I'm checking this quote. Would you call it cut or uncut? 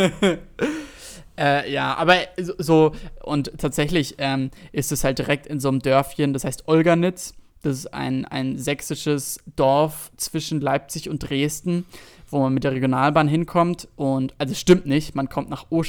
uncut